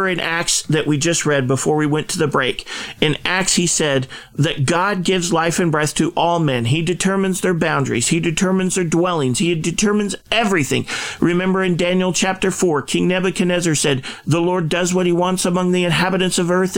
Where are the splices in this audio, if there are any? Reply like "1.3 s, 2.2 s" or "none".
none

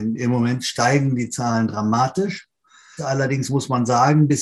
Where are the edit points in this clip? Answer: 3.0 s

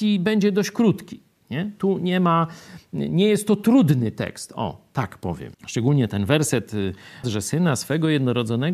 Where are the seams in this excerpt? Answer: 5.5 s, 7.2 s

